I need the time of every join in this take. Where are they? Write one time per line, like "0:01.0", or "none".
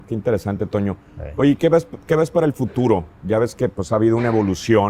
none